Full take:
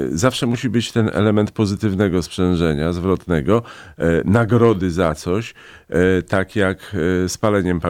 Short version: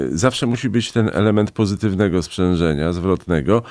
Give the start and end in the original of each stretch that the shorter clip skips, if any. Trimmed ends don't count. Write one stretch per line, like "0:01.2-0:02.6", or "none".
none